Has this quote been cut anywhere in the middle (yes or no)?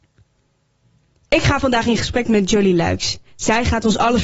no